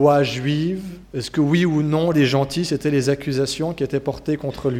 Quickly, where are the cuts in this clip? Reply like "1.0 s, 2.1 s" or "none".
1.0 s, 2.1 s